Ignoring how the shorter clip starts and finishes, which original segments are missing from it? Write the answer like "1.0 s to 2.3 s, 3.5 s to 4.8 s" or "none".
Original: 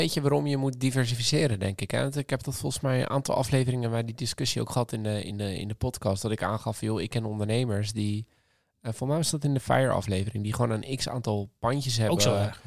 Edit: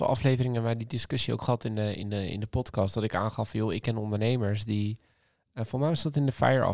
none